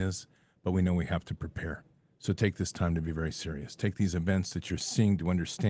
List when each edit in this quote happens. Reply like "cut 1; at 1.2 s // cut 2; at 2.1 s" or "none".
none

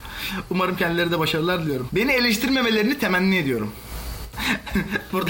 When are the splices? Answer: cut 1; at 1.9 s // cut 2; at 4.3 s

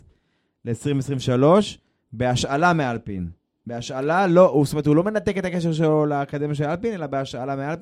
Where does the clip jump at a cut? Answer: none

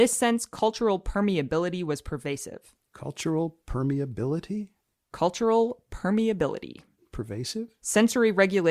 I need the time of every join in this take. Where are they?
cut 1; at 7.8 s

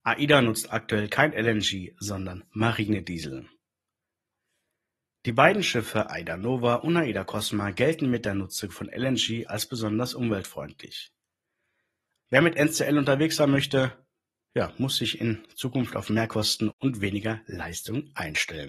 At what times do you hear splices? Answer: cut 1; at 9.5 s // cut 2; at 12.2 s

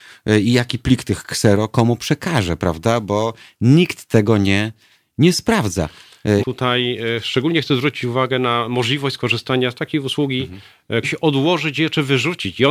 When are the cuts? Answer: cut 1; at 6.4 s // cut 2; at 11.0 s

